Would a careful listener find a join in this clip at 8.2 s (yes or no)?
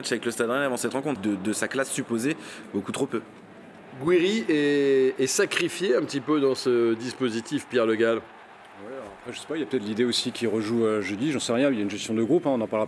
no